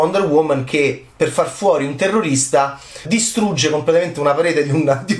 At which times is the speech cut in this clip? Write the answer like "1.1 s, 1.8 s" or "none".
3.0 s